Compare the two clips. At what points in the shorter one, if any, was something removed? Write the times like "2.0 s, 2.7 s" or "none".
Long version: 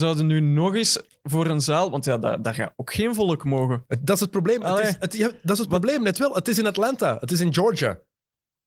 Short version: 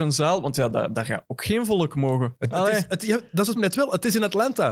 2.5 s, 3.6 s